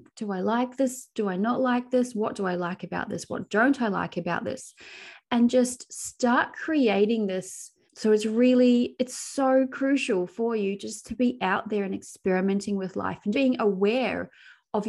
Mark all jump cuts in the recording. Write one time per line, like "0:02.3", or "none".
0:07.9
0:13.3